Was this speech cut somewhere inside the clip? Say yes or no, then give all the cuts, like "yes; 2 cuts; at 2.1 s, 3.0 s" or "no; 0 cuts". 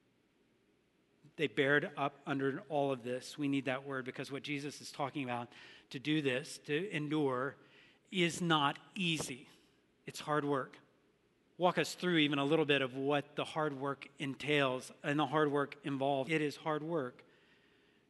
yes; 2 cuts; at 11.5 s, 16.3 s